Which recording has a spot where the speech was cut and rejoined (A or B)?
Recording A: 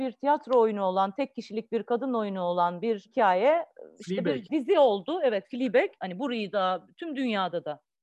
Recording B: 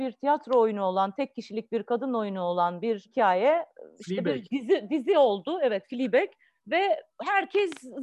A